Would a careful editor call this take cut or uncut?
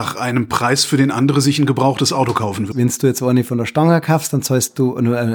cut